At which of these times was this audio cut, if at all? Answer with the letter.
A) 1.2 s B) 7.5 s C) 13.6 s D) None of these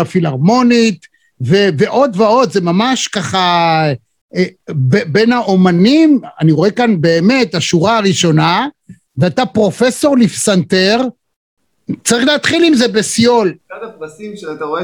C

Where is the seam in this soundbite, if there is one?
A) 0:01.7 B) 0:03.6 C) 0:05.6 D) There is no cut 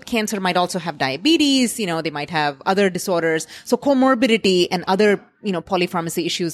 D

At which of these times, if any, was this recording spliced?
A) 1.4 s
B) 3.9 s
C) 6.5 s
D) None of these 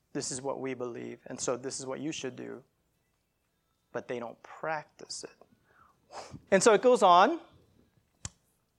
C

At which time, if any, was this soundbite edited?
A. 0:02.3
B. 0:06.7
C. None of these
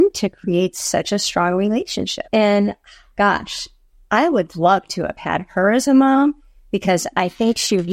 A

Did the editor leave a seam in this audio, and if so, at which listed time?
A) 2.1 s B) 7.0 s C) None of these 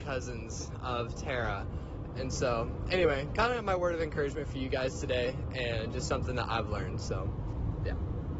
A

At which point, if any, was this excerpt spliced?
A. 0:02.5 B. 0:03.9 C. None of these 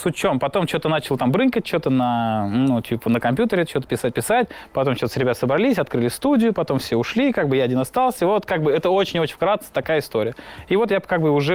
B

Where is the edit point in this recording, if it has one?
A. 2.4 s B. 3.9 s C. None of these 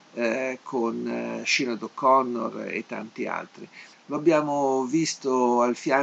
B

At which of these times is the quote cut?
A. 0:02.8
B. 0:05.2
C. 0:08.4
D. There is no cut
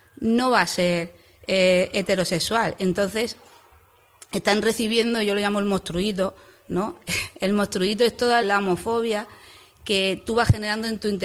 C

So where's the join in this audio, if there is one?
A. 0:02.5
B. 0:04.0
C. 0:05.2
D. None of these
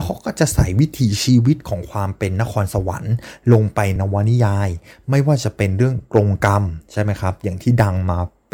B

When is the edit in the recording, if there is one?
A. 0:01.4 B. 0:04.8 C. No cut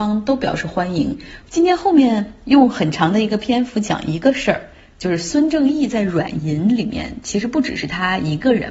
A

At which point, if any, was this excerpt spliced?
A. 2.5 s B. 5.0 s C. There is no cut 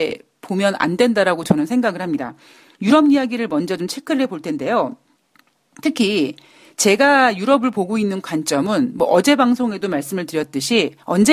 C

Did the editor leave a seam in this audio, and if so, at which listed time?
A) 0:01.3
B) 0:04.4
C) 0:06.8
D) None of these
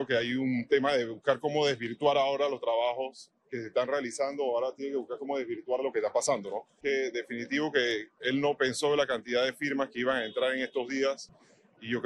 C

